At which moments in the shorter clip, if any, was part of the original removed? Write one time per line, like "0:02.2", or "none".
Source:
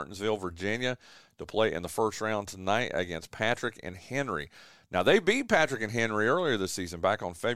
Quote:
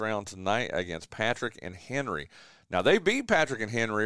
none